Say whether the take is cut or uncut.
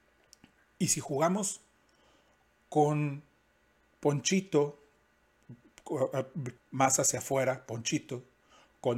cut